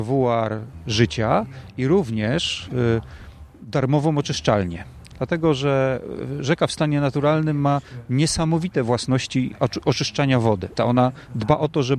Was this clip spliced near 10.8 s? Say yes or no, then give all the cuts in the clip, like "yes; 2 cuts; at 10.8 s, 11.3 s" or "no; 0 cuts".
yes; 1 cut; at 10.8 s